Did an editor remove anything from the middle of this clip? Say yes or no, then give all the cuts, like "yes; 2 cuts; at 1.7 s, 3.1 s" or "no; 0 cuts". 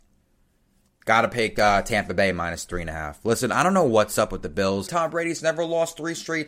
yes; 1 cut; at 4.9 s